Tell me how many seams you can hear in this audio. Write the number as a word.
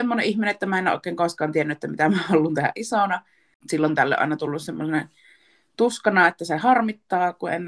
zero